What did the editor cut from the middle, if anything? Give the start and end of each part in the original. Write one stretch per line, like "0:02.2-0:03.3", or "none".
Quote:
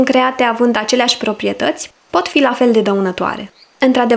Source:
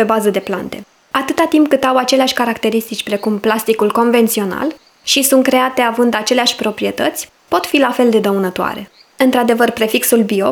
none